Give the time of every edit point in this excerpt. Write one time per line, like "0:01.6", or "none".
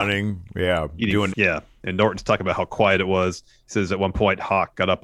0:01.3

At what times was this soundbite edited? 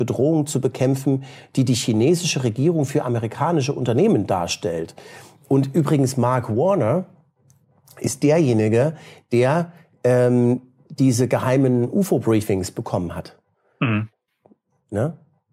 none

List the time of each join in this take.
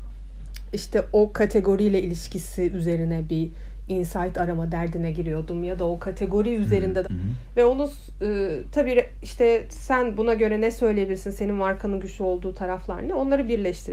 0:07.0

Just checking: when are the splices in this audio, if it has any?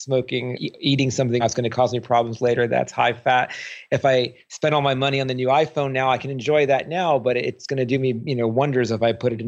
0:01.4

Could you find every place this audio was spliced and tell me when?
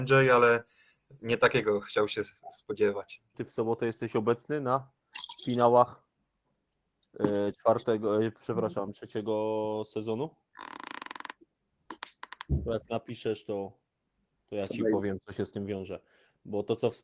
0:03.3

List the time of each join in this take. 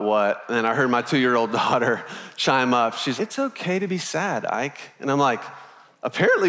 0:03.2

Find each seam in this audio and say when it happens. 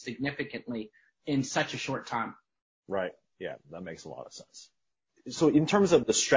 none

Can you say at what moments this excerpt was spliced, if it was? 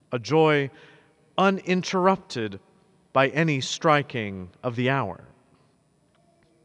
none

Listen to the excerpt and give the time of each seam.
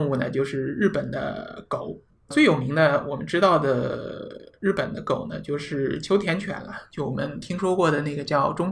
none

